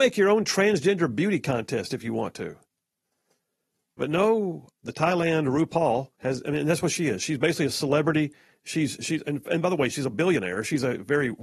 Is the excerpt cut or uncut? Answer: cut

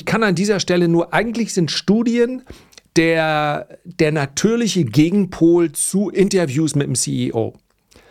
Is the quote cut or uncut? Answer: uncut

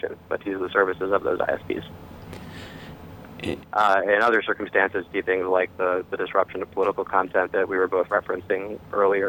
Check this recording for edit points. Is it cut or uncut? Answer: cut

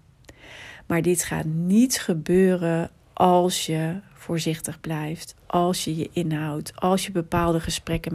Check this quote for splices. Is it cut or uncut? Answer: uncut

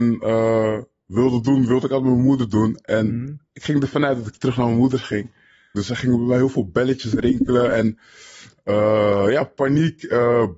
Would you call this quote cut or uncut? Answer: cut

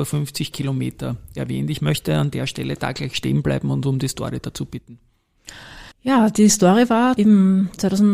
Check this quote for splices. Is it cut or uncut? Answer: cut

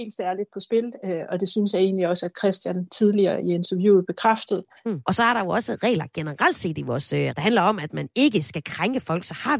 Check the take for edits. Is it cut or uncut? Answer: cut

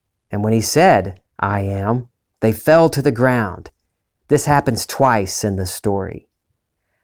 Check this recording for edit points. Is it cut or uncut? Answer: uncut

